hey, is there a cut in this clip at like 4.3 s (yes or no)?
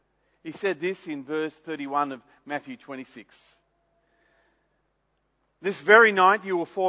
no